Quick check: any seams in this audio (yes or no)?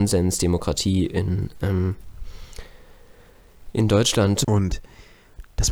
yes